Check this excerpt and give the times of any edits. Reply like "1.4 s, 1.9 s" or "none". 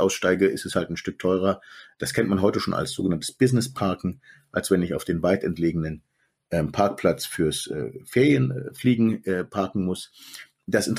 none